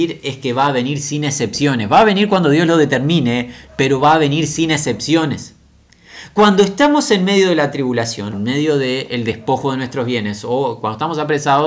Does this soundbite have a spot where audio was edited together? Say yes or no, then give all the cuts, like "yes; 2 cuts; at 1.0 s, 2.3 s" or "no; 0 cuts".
yes; 1 cut; at 8.3 s